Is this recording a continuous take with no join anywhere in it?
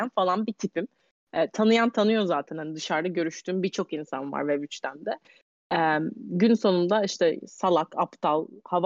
yes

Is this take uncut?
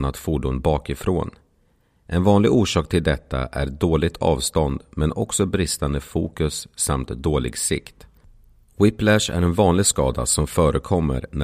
yes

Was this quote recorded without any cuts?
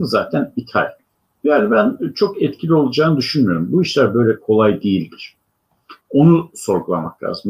no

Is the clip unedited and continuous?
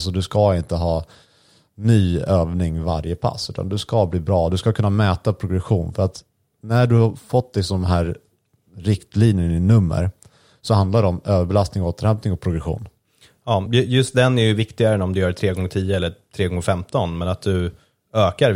yes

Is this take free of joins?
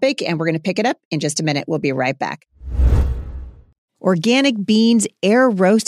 no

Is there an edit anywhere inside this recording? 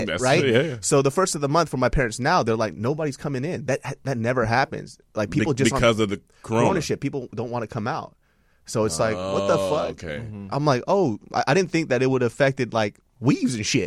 no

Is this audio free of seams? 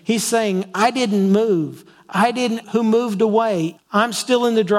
no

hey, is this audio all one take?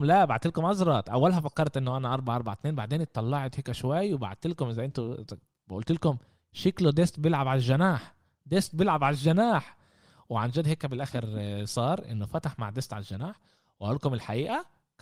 yes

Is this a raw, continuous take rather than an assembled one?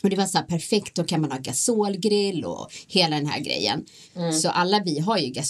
no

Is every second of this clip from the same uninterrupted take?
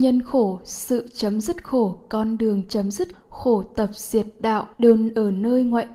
no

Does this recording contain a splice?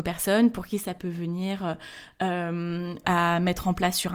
yes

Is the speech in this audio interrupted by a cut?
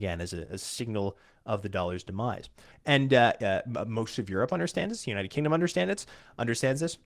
yes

